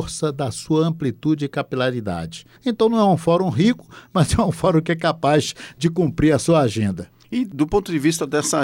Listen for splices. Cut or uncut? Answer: cut